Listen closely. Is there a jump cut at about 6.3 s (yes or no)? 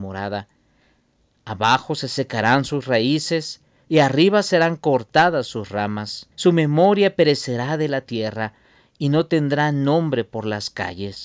yes